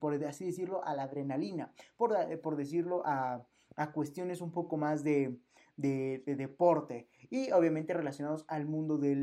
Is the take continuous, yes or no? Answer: yes